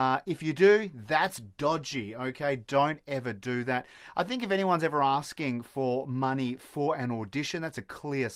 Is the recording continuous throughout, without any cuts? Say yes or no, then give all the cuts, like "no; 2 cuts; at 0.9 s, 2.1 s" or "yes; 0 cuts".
yes; 0 cuts